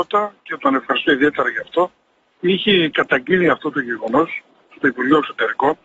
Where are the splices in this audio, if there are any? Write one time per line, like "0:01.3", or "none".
0:02.4